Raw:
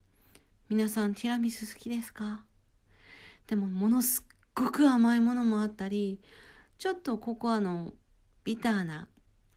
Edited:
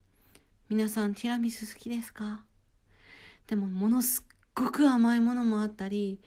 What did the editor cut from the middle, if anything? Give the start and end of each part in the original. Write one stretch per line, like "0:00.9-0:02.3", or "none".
none